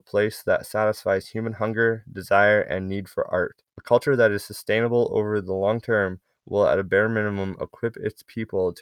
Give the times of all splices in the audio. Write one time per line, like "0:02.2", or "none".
0:03.7